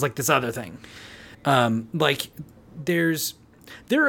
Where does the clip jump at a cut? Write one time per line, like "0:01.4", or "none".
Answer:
0:01.3